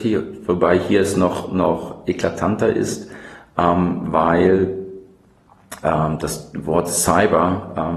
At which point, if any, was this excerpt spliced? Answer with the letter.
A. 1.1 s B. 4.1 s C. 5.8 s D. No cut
D